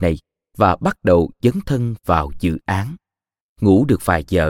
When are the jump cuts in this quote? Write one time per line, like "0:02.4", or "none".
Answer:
0:03.4